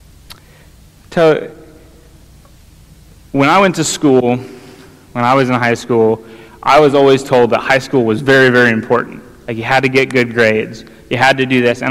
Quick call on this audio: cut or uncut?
uncut